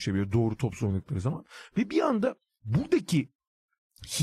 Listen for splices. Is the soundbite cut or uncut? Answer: uncut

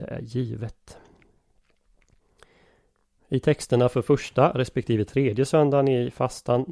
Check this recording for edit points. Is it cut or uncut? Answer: uncut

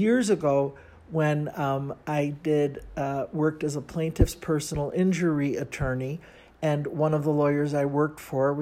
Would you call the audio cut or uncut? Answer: uncut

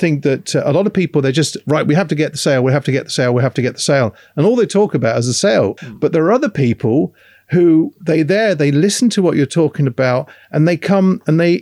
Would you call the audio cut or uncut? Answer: cut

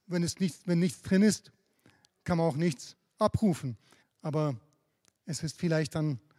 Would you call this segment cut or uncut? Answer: cut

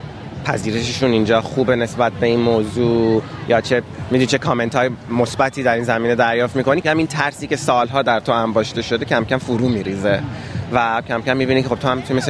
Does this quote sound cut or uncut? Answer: cut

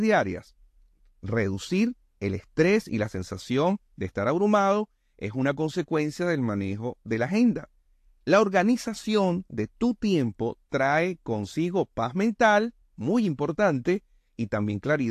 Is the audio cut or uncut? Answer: uncut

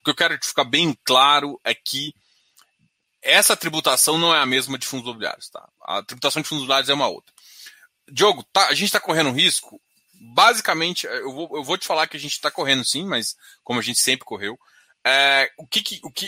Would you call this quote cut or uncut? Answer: uncut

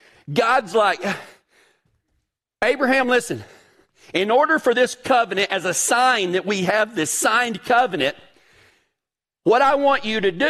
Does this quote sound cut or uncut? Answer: uncut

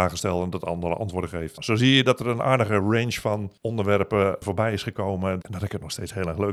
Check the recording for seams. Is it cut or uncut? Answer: cut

